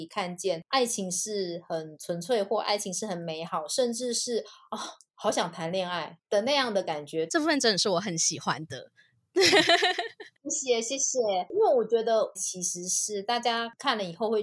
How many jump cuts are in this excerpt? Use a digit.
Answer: 2